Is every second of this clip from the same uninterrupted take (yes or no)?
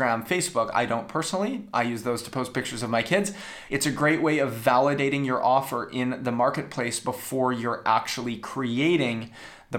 no